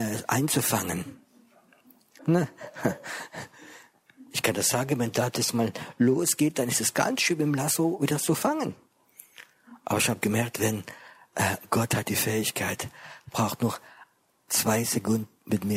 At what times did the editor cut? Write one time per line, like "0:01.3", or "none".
0:02.2